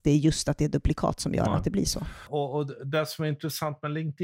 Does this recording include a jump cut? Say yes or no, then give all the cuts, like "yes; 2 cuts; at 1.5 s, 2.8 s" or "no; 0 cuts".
no; 0 cuts